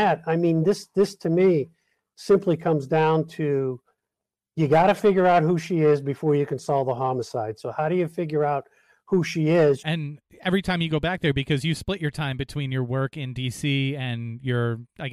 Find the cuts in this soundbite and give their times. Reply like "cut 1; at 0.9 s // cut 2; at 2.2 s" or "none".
cut 1; at 9.8 s